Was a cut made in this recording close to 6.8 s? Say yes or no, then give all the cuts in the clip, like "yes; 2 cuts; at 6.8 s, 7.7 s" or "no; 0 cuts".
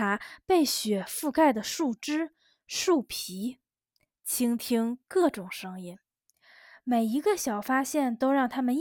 no; 0 cuts